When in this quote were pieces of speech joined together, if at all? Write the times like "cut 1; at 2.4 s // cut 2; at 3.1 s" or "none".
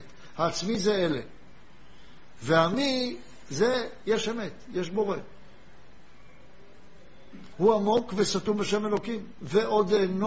cut 1; at 7.5 s